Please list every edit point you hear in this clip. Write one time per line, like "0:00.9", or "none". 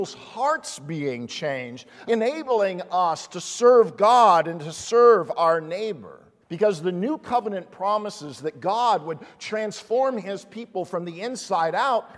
0:02.0
0:06.4